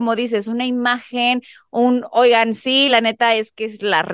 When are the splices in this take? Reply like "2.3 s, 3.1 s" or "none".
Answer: none

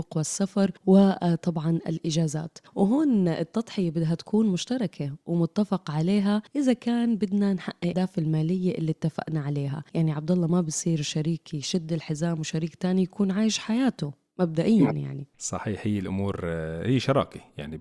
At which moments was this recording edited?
7.9 s, 15.3 s

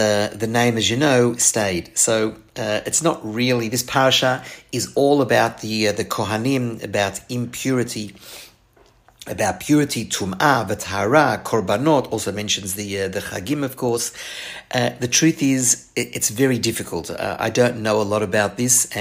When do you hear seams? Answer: none

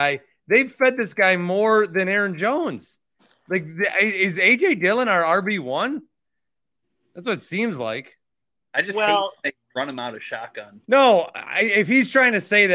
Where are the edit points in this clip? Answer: 10.8 s

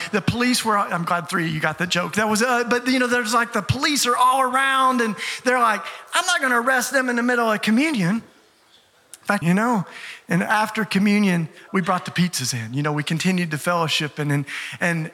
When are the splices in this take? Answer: 9.4 s, 11.7 s

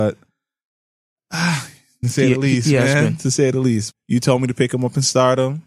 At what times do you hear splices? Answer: 2.0 s, 3.9 s

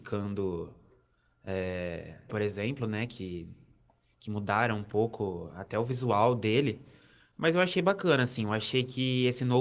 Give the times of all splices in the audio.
2.3 s

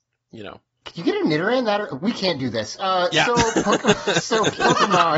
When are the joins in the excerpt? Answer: none

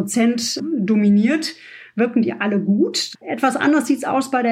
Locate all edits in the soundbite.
3.2 s

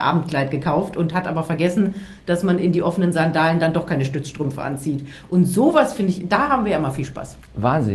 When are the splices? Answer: none

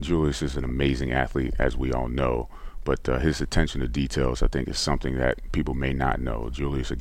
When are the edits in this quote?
none

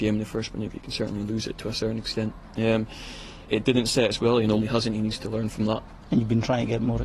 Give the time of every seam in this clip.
3.5 s, 4.6 s, 6.0 s

